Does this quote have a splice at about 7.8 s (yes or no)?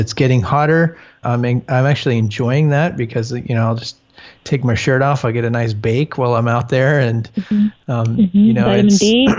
no